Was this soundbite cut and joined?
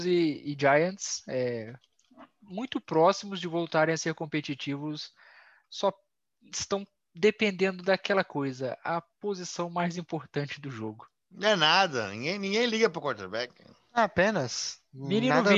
no; 0 cuts

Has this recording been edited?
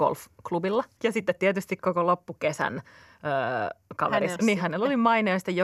yes; 2 cuts; at 1.0 s, 4.4 s

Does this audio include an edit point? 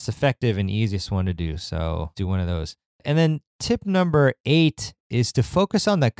yes; 1 cut; at 2.1 s

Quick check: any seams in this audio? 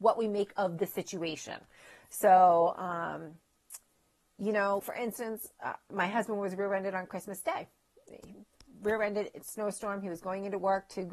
yes; 1 cut; at 4.8 s

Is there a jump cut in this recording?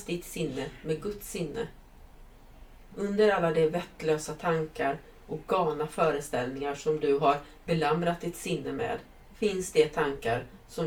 yes; 1 cut; at 2.9 s

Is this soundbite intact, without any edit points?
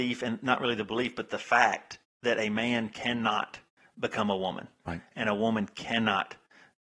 yes; 0 cuts

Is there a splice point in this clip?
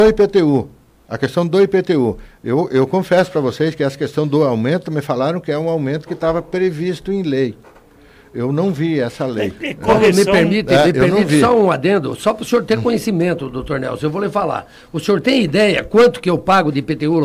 no; 0 cuts

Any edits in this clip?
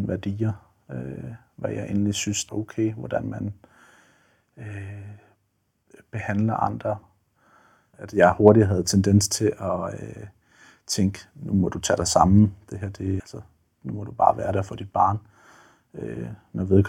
yes; 2 cuts; at 2.5 s, 13.2 s

